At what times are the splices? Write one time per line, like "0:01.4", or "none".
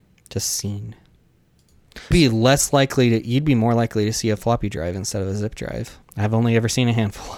0:02.1
0:06.0